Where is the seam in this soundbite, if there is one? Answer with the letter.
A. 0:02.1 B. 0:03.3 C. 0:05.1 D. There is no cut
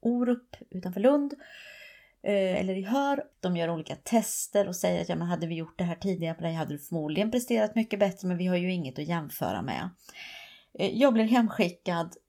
B